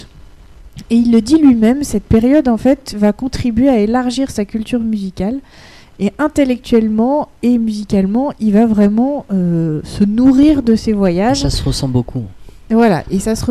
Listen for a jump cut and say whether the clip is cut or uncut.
uncut